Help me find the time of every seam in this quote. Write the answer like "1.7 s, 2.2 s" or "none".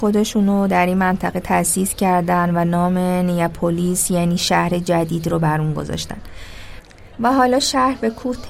7.1 s